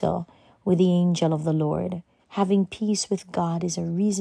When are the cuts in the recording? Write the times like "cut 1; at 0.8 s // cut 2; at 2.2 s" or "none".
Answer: cut 1; at 2.2 s